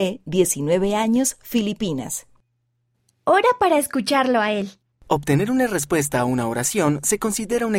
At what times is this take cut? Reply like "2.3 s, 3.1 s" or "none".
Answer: 4.9 s